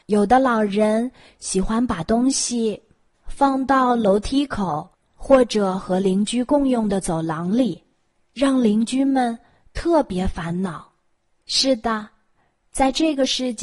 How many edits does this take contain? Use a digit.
0